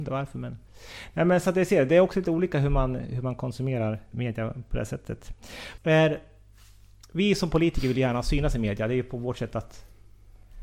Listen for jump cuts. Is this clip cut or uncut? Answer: cut